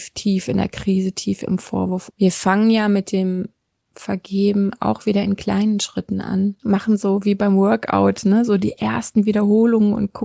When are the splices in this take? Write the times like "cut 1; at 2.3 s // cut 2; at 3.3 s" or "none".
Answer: cut 1; at 2.1 s // cut 2; at 6.6 s